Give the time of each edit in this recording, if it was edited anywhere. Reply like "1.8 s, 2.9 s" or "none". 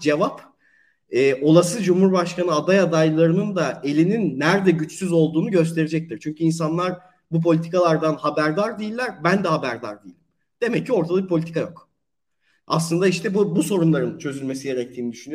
none